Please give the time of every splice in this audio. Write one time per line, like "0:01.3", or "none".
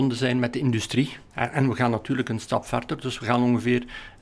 0:01.3